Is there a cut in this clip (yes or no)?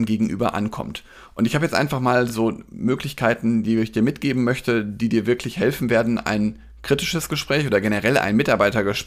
no